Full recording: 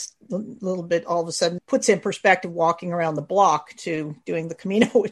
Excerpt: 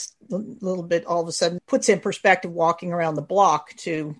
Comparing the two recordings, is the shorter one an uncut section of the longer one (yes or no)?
yes